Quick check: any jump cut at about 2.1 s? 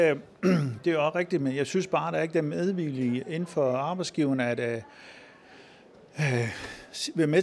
no; 0 cuts

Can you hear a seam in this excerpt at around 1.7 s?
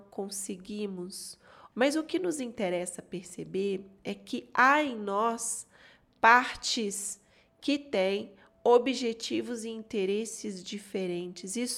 yes; 1 cut; at 1.7 s

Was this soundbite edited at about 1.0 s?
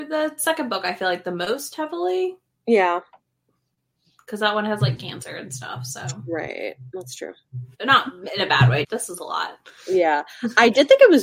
no; 2 cuts; at 7.7 s, 8.8 s

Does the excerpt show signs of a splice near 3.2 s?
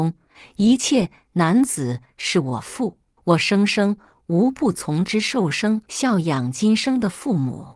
yes; 2 cuts; at 3.2 s, 5.8 s

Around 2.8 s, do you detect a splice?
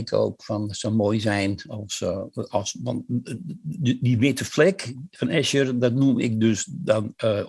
no; 0 cuts

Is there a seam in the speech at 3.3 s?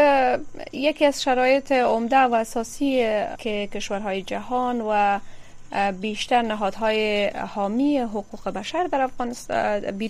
yes; 1 cut; at 3.3 s

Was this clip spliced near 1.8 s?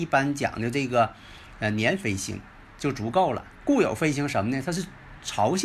no; 1 cut; at 3.6 s

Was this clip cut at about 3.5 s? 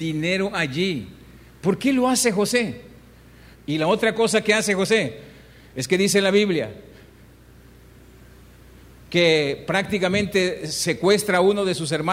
yes; 1 cut; at 3.5 s

